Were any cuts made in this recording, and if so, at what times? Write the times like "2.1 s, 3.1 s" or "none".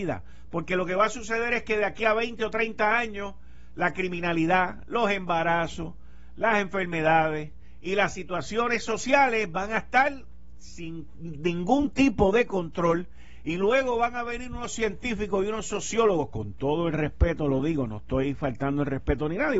none